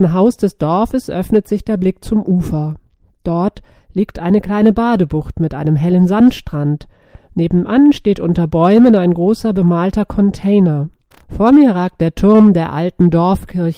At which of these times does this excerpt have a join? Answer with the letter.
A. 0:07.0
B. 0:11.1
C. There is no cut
B